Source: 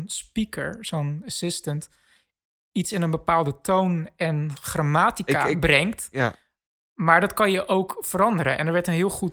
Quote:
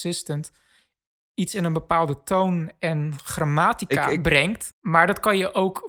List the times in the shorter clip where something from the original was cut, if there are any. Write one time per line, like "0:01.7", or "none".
0:04.7